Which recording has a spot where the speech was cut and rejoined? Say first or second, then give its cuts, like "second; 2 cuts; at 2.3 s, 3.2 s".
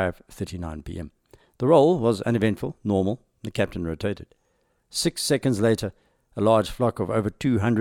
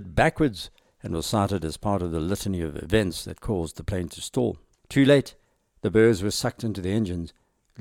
second; 1 cut; at 4.8 s